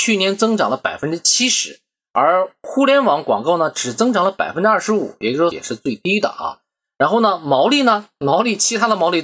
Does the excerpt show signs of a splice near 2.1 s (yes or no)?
no